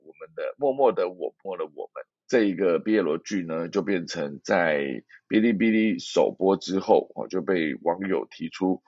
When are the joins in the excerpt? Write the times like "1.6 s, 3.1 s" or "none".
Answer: 1.5 s